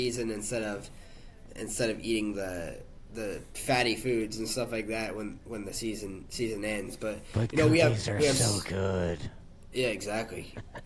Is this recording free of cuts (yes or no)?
yes